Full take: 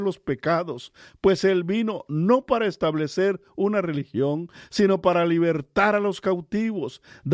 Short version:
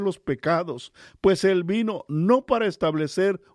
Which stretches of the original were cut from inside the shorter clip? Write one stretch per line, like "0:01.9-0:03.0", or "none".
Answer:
none